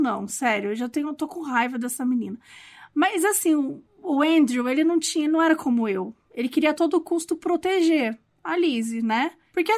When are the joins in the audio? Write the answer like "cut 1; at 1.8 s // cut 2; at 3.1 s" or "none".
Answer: none